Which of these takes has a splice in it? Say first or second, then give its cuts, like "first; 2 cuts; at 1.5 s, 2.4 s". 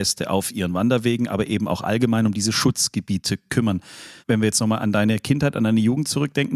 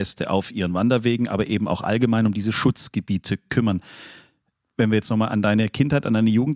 first; 1 cut; at 4.2 s